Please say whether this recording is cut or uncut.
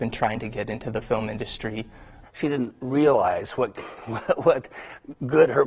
cut